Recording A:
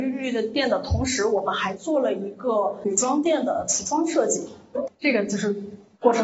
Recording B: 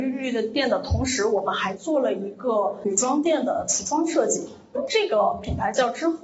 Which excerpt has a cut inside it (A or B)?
A